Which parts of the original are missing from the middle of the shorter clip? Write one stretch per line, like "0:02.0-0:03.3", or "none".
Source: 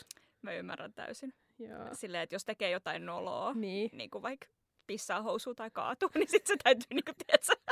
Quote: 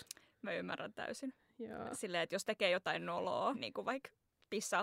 0:03.5-0:03.9